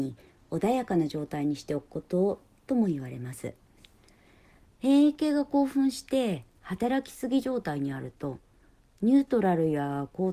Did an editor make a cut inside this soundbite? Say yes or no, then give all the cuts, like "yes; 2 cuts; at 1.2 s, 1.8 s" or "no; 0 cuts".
no; 0 cuts